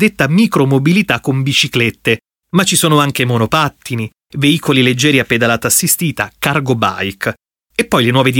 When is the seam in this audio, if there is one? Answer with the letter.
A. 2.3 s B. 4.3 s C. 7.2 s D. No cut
D